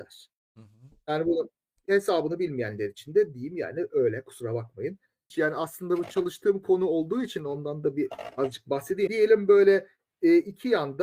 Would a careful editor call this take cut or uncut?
cut